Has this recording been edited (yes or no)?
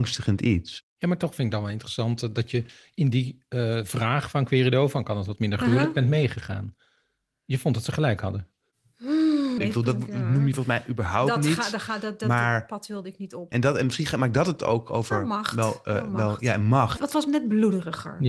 yes